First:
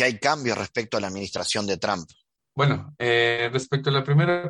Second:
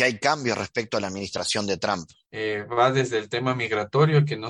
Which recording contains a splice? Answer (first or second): second